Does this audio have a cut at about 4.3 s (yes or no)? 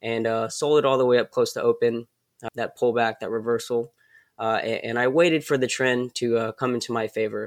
no